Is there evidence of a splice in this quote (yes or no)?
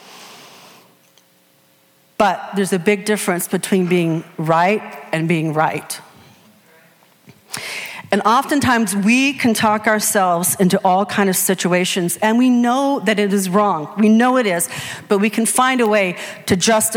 no